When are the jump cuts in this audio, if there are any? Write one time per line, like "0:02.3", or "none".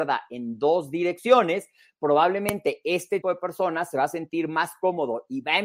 0:03.2